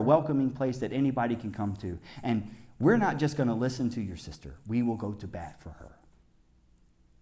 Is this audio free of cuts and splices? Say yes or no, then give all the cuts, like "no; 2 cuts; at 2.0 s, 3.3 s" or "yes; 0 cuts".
yes; 0 cuts